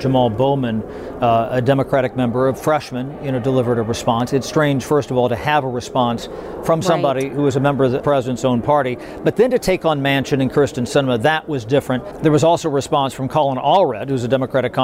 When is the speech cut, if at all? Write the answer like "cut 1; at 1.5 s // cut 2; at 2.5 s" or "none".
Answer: cut 1; at 8.0 s